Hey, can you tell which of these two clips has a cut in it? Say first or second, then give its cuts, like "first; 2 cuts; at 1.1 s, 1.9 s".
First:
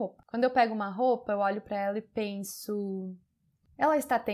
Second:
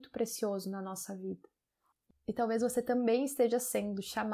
second; 1 cut; at 2.1 s